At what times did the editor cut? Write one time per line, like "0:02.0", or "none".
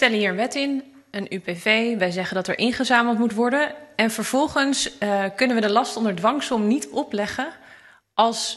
none